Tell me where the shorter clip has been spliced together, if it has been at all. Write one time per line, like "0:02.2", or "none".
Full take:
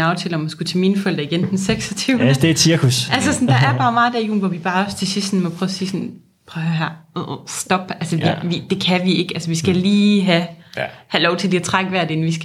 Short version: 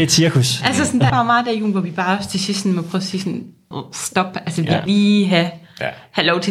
0:01.1
0:03.7
0:04.9